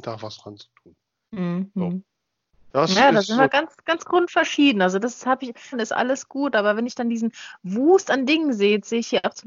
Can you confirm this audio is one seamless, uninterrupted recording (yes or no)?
no